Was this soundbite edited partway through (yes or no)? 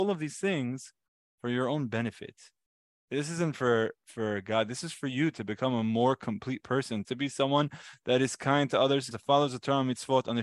yes